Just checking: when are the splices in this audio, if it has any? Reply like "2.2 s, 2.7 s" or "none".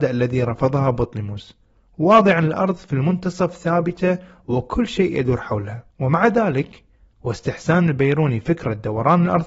5.9 s